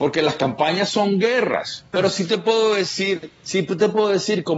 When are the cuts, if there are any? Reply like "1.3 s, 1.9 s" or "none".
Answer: 1.9 s